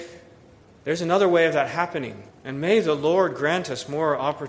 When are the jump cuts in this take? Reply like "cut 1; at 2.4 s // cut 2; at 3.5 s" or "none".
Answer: cut 1; at 2.3 s